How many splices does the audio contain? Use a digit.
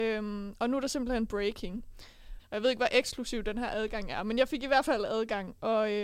1